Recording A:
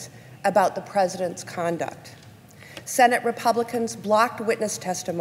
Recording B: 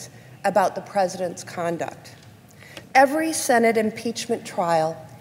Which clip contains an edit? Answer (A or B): B